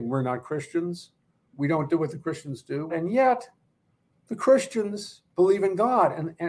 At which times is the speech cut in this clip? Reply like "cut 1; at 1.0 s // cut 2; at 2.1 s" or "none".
cut 1; at 2.9 s